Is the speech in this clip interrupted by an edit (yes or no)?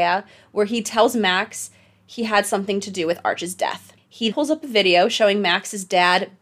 yes